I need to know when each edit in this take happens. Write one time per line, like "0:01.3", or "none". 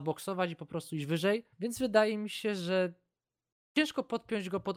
0:01.5